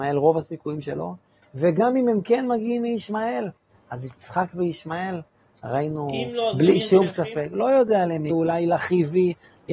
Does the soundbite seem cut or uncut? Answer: cut